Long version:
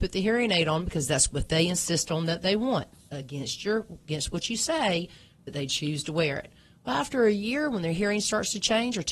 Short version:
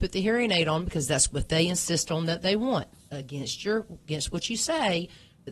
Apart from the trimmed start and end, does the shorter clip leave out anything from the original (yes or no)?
no